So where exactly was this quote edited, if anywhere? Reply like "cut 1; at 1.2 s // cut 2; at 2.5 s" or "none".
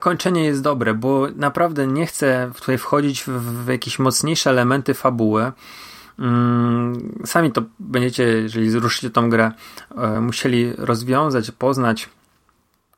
none